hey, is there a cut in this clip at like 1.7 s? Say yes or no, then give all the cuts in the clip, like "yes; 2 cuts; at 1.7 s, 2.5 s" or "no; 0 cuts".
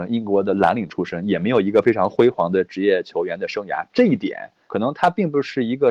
no; 1 cut; at 4.7 s